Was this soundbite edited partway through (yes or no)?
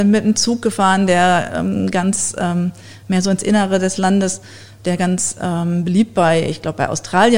no